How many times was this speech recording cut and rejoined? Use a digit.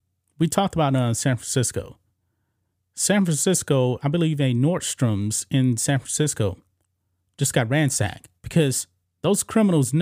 1